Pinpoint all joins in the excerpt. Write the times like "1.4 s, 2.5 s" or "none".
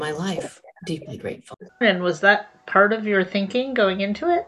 1.8 s